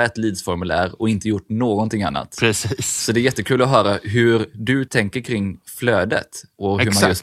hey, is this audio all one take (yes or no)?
yes